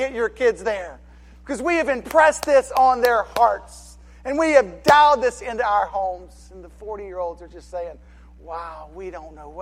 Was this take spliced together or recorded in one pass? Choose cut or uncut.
uncut